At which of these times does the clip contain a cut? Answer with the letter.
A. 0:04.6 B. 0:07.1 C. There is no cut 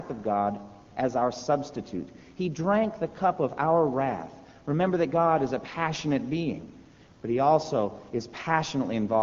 B